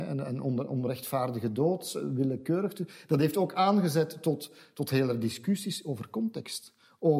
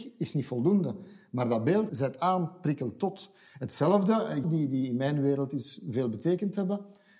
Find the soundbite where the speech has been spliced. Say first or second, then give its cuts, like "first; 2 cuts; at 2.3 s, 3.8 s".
second; 2 cuts; at 1.9 s, 4.4 s